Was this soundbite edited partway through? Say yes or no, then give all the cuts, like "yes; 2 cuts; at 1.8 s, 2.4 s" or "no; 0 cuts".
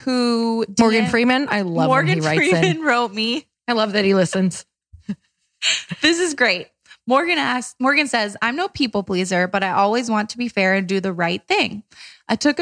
no; 0 cuts